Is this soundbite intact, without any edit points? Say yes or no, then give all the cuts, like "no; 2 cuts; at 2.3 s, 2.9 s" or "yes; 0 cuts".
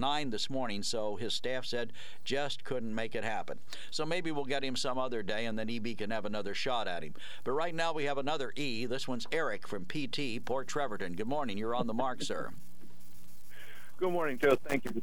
yes; 0 cuts